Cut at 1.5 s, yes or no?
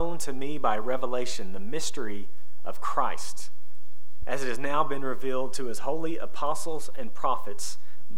no